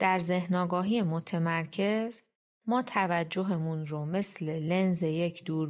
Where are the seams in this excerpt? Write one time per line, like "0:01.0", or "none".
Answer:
none

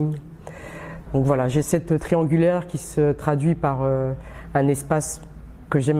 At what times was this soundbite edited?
0:01.1

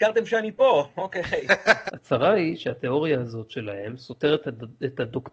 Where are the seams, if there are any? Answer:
0:01.9

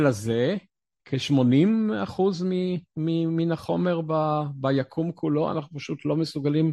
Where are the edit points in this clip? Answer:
none

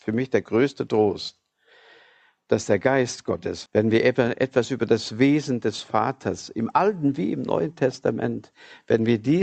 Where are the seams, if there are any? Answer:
0:03.7

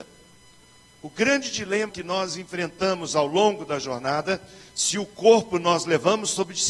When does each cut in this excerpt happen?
0:01.9

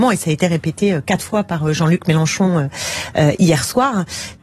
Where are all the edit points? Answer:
none

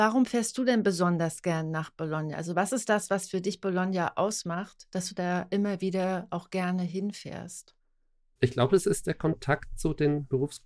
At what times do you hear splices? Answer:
none

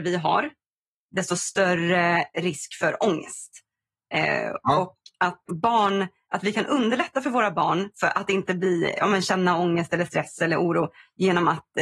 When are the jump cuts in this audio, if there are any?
0:05.5
0:07.9

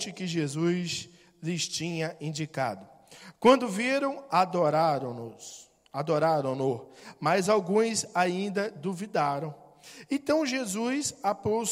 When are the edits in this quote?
none

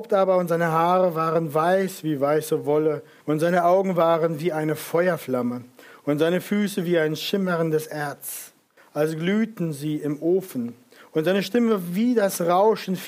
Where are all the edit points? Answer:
0:03.2

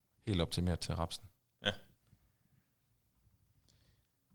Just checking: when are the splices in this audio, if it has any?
none

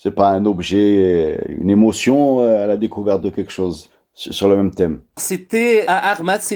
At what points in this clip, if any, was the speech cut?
0:05.2

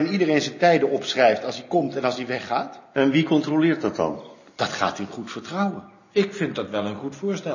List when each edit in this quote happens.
none

